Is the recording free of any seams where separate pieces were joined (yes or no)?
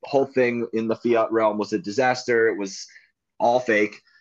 yes